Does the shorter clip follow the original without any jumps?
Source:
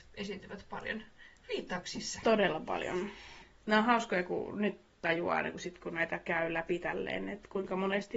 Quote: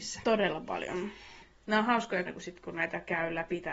no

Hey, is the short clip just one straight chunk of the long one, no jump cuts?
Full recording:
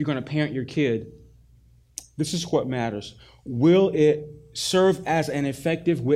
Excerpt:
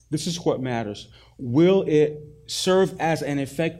yes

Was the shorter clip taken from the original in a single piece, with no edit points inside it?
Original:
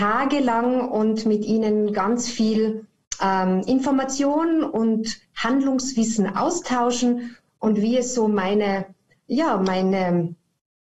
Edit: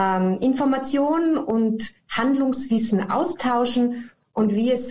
yes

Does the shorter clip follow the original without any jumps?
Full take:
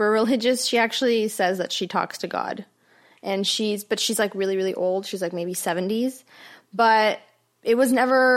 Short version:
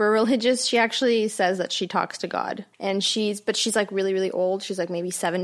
no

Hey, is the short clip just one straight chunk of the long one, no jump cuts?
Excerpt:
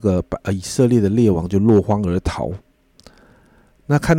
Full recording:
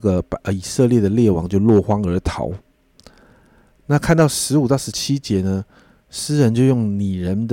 yes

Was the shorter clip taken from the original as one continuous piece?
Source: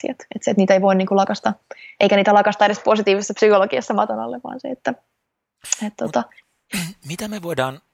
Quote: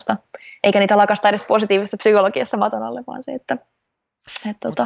yes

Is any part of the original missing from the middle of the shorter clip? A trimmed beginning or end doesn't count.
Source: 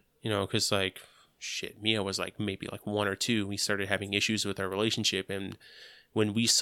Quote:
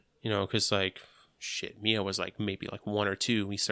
no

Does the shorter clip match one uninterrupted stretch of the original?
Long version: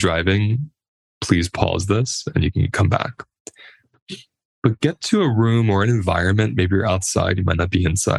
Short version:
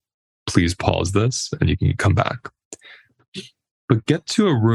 yes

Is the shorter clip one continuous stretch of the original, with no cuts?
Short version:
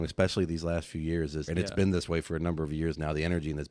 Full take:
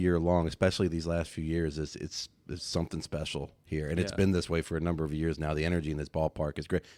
no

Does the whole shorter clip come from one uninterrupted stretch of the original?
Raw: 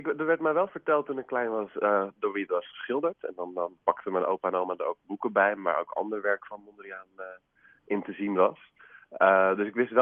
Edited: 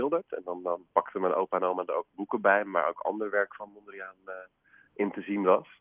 yes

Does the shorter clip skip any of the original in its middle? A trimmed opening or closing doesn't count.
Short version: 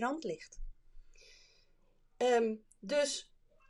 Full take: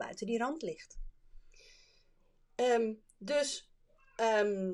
no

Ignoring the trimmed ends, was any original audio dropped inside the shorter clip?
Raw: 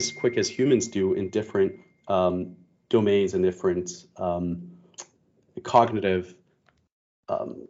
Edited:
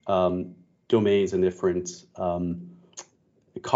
no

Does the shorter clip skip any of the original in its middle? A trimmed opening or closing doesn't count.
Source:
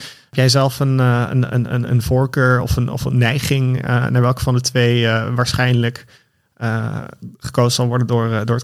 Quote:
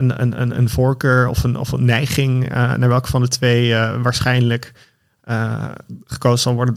no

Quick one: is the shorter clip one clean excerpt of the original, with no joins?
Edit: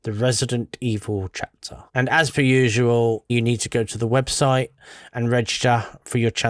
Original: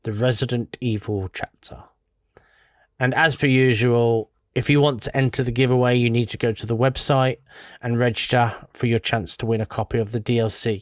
no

